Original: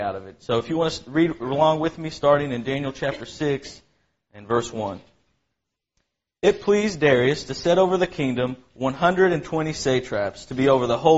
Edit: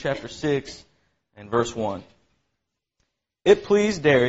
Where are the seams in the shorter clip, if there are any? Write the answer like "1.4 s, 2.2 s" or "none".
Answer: none